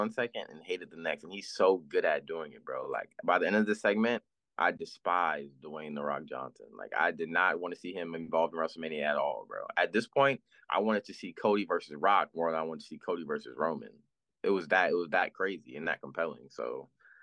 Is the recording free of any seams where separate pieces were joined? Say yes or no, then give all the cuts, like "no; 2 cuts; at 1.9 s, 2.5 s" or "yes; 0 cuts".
yes; 0 cuts